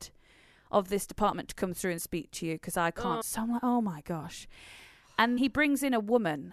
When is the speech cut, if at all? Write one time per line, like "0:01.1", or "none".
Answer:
0:03.2
0:05.4